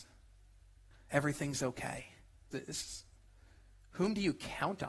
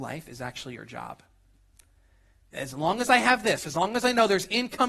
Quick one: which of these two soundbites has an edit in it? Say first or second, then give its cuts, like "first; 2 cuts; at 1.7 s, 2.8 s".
first; 2 cuts; at 0.9 s, 2.5 s